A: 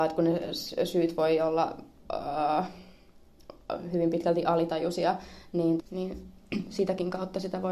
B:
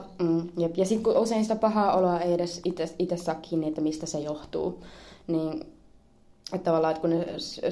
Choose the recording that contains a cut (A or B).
A